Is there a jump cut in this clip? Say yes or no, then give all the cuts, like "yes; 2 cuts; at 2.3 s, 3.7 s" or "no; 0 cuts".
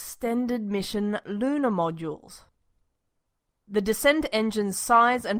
no; 0 cuts